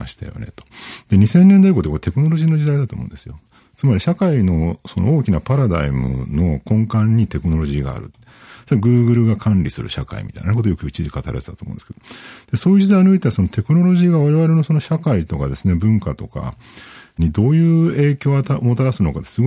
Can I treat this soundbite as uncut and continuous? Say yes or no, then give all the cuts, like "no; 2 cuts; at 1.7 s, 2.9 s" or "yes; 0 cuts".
yes; 0 cuts